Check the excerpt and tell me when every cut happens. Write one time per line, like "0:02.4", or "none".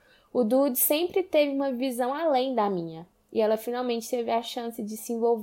0:03.2